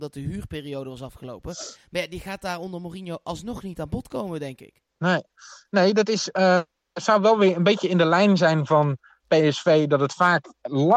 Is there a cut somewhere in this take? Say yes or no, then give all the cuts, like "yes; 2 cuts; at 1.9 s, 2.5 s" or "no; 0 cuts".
yes; 1 cut; at 4.9 s